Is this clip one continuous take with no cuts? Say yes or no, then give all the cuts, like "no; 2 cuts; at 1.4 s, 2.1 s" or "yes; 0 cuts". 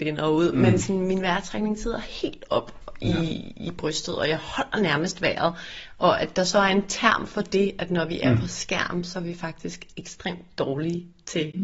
yes; 0 cuts